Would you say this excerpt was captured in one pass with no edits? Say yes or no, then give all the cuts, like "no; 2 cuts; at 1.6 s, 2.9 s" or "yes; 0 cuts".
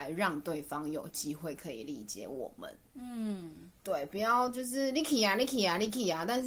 yes; 0 cuts